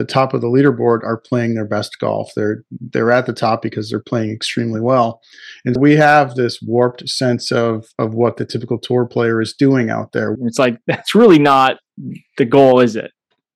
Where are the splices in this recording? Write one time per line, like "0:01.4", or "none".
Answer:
0:05.8
0:10.4